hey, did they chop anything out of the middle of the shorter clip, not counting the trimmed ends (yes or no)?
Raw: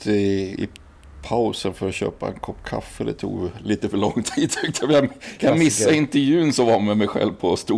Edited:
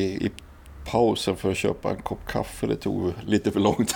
no